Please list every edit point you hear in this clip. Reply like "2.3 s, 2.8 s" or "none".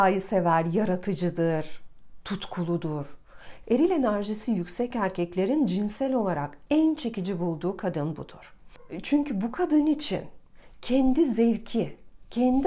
3.6 s